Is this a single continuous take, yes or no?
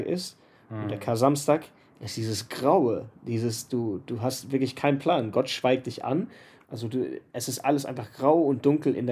no